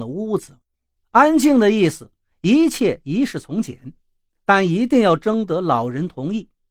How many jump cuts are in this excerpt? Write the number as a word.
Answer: one